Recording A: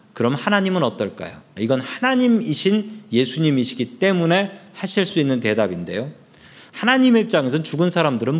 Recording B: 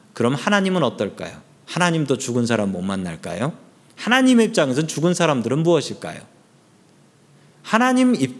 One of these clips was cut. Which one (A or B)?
A